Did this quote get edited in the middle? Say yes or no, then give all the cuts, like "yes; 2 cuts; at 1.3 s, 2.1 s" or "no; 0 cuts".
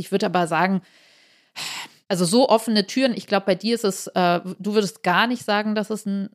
no; 0 cuts